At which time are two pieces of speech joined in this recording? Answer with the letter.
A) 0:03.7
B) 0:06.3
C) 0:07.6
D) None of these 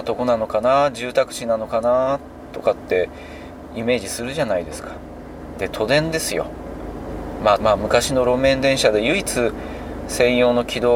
C